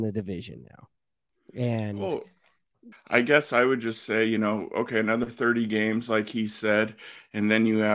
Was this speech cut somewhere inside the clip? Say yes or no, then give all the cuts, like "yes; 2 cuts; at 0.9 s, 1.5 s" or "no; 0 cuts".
yes; 1 cut; at 2.9 s